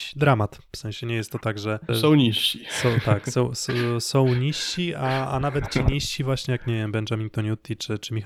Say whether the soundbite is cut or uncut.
cut